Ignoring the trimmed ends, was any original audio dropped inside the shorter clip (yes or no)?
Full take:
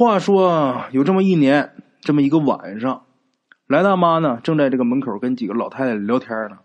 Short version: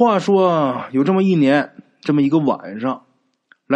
no